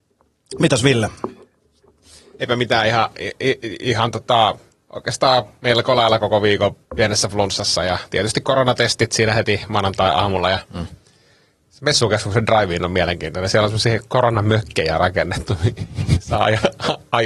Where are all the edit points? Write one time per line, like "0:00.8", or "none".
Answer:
0:06.8